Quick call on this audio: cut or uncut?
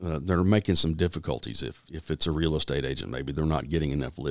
uncut